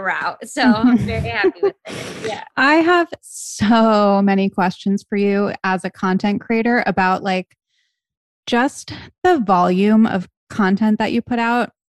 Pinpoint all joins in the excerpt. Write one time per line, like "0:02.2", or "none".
none